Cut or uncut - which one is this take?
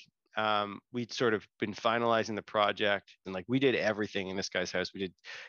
cut